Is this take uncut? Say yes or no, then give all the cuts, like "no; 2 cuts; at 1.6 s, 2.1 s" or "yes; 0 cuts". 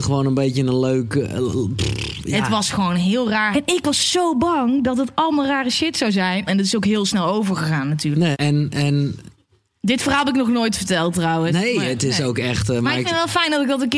no; 3 cuts; at 3.5 s, 6.5 s, 8.3 s